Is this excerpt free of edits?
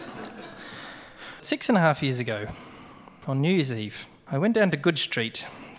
yes; 0 cuts

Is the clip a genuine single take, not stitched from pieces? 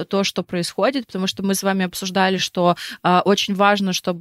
yes; 0 cuts

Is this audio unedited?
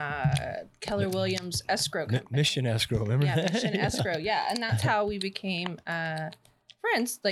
yes; 0 cuts

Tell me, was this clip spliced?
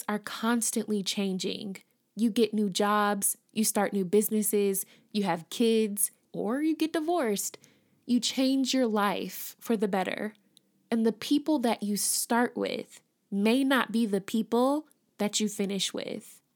yes; 1 cut; at 6.2 s

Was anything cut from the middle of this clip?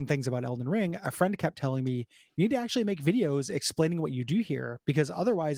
no; 0 cuts

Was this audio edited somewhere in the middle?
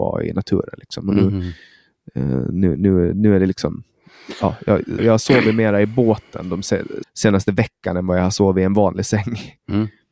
yes; 2 cuts; at 5.0 s, 7.0 s

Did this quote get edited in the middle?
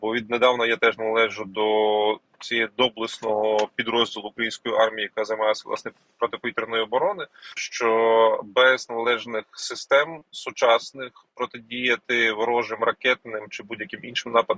yes; 1 cut; at 7.6 s

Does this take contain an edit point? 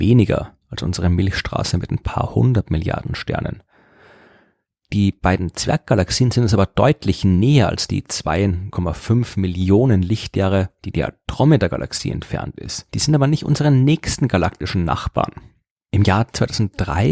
no; 0 cuts

